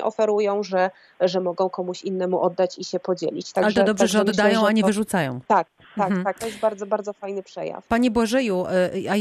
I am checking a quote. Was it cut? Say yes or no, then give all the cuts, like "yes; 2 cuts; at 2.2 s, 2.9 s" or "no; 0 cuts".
no; 0 cuts